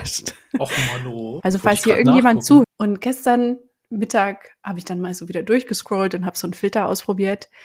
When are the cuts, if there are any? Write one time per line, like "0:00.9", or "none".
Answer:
0:01.4
0:02.6